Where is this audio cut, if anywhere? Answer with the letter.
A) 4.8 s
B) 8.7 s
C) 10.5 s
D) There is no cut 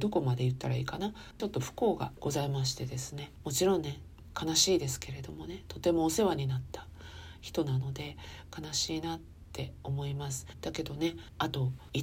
C